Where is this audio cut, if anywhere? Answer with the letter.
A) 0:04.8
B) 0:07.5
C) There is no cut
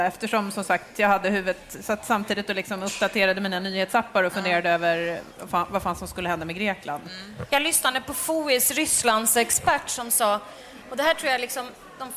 B